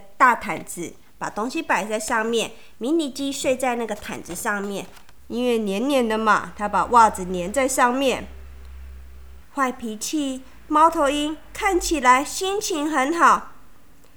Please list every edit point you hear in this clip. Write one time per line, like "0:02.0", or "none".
0:05.2
0:09.4